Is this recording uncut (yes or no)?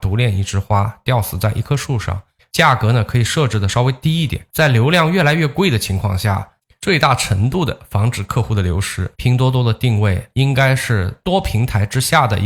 no